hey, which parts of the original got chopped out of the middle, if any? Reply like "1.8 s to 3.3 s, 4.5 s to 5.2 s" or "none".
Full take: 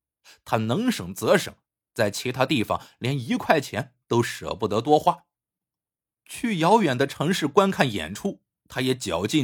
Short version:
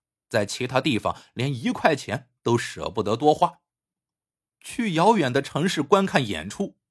none